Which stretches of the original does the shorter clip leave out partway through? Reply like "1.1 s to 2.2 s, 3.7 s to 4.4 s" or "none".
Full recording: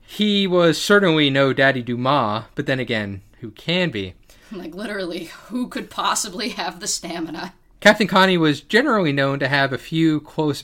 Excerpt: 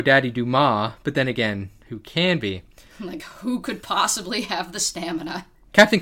4.7 s to 5.3 s